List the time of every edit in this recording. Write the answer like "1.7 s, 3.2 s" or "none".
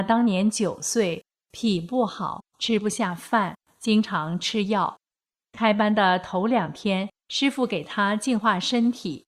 none

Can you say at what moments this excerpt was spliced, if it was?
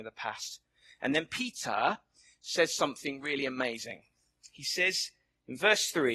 none

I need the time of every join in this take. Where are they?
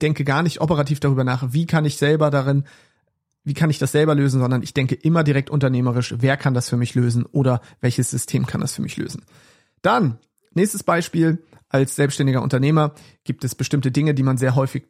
none

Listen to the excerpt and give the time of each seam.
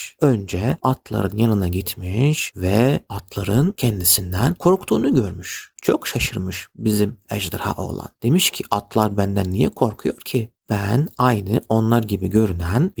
none

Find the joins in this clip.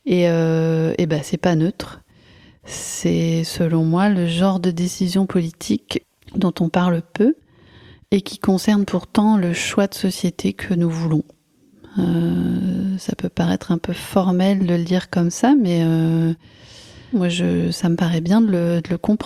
17.1 s

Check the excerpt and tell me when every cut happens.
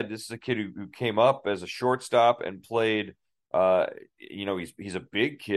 3.5 s

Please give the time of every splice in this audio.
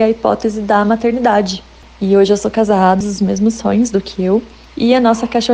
3.0 s

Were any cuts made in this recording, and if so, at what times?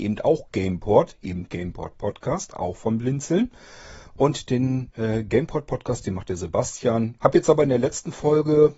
7.2 s

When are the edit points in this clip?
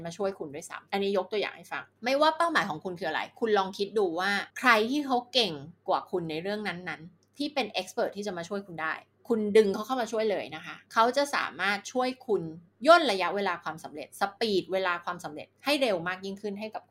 4.5 s

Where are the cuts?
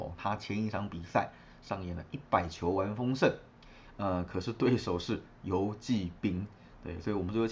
none

